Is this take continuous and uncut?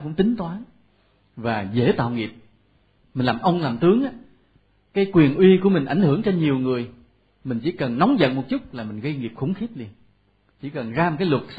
yes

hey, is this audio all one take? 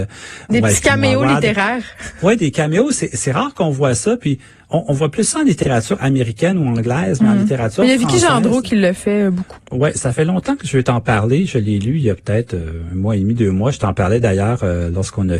no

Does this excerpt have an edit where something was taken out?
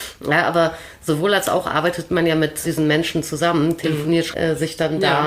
yes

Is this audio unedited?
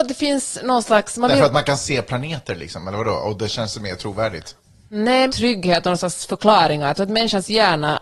no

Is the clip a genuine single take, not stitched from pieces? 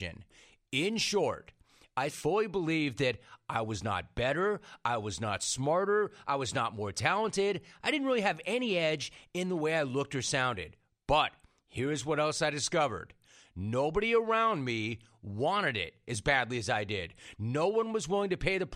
no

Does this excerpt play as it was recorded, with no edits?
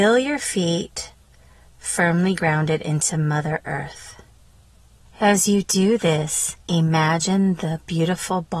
no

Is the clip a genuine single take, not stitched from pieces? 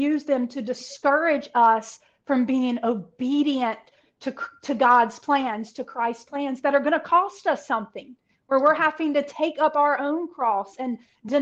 yes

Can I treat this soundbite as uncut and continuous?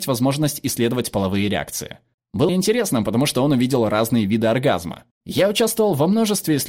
no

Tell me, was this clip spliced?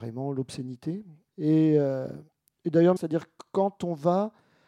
yes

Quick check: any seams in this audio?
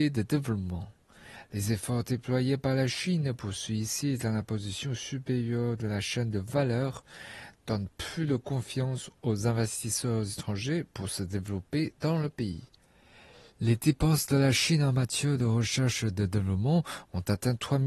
no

